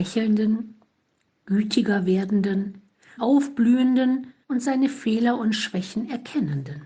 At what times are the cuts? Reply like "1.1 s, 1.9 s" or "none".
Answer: 3.2 s, 4.4 s